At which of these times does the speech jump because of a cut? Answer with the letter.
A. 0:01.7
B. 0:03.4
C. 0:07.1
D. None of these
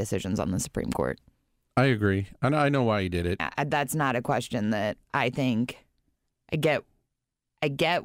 B